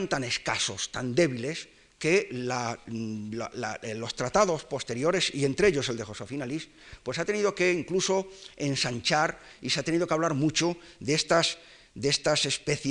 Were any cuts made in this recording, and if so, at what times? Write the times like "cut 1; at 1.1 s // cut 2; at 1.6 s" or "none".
none